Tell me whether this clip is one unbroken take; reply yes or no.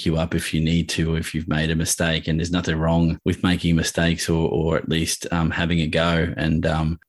yes